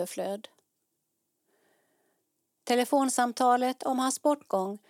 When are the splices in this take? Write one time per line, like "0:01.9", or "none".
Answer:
none